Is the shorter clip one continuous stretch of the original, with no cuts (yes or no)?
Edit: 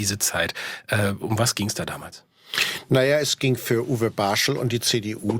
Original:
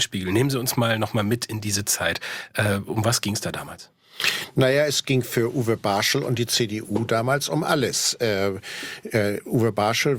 yes